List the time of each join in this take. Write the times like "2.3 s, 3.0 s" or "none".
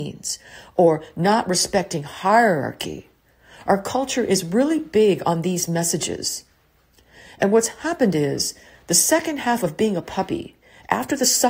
none